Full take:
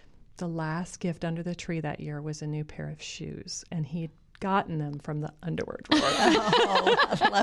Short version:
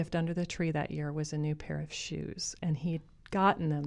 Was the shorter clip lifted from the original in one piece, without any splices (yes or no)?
yes